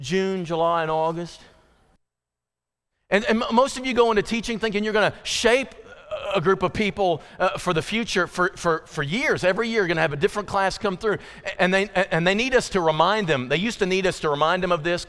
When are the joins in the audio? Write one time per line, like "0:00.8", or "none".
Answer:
0:11.6

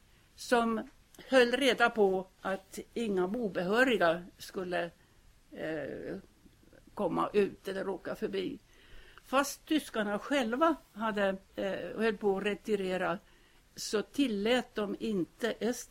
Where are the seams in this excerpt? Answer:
0:09.2
0:11.5

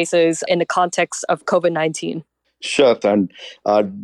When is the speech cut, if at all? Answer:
0:03.0

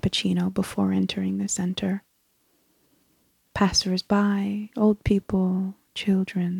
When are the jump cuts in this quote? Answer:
0:04.7

